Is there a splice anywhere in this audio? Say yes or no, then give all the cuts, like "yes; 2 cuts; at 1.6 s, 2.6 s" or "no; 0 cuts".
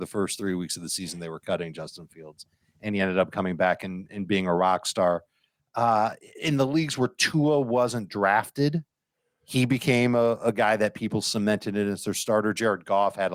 no; 0 cuts